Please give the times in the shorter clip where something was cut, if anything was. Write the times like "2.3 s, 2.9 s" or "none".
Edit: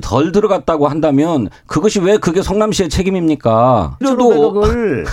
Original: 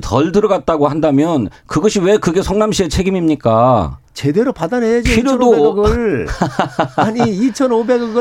4.0 s